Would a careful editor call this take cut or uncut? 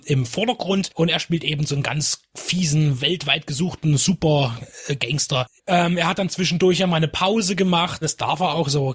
cut